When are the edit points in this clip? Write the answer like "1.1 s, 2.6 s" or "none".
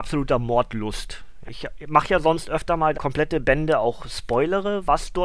1.5 s, 2.9 s